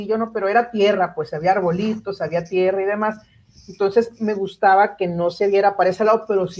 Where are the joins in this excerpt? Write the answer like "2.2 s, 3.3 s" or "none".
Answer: none